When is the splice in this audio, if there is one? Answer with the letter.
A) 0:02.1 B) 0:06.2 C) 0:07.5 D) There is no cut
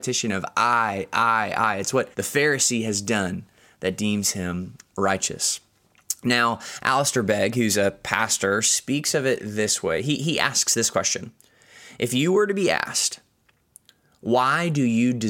A